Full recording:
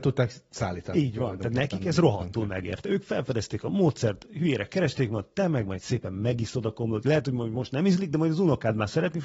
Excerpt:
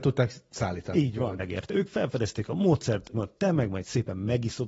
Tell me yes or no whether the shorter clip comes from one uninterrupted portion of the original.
no